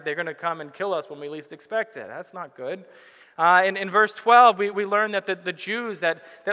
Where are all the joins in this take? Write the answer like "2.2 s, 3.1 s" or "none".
none

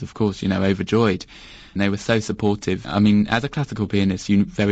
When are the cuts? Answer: 1.8 s, 2.8 s

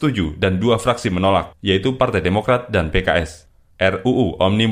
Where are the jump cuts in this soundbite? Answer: 3.7 s

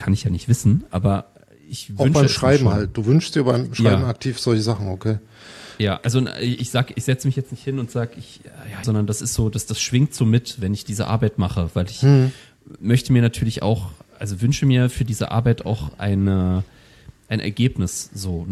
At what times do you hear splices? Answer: 8.8 s

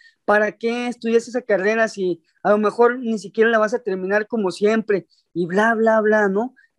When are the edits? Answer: none

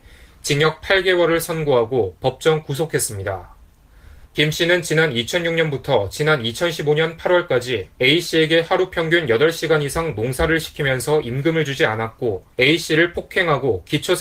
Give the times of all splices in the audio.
4.2 s, 7.9 s, 12.5 s

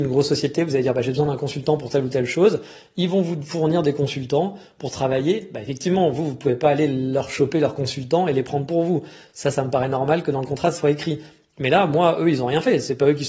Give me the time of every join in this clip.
none

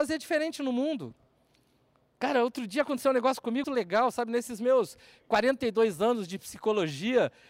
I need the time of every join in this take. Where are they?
3.6 s

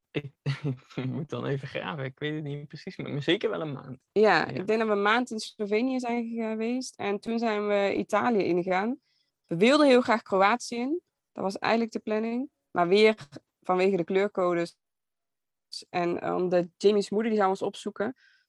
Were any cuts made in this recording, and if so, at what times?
none

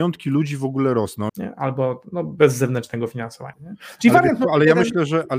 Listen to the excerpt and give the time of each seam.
1.3 s, 3.5 s

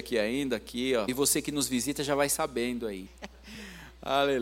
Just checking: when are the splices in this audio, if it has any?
1.1 s, 3.1 s

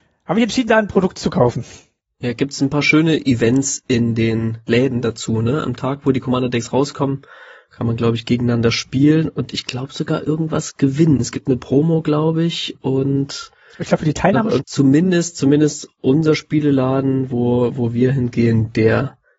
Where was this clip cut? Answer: 14.6 s

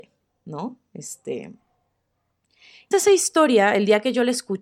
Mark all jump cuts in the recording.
2.9 s

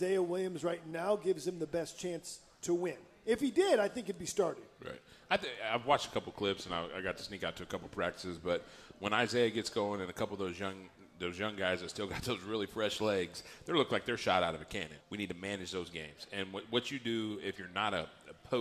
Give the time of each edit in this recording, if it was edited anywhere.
15.0 s

